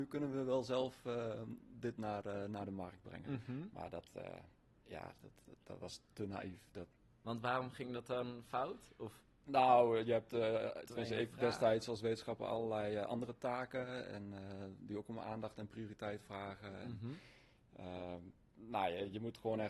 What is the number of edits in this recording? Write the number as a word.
zero